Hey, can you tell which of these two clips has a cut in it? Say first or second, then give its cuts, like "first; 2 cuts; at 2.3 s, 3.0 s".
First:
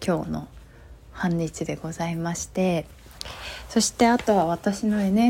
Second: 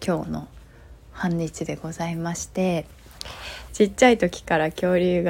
second; 1 cut; at 3.7 s